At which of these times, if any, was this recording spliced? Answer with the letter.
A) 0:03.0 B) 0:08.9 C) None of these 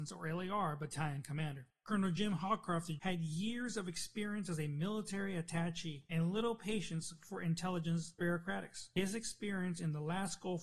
A